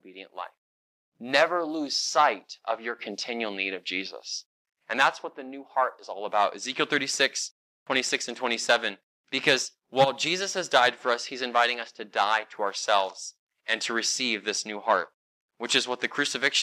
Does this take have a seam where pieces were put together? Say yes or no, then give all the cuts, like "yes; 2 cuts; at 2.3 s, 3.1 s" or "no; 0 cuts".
no; 0 cuts